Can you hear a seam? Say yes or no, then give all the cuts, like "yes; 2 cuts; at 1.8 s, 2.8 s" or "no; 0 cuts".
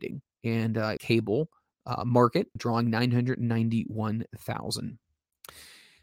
yes; 2 cuts; at 1.0 s, 2.6 s